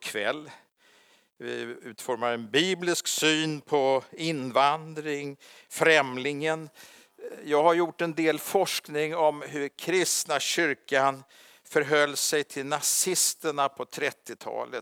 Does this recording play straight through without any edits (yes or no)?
yes